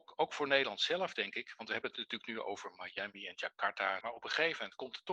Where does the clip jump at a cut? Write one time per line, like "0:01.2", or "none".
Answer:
0:04.0